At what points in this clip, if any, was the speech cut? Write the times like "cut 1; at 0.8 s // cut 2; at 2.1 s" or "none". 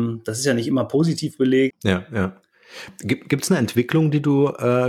cut 1; at 1.7 s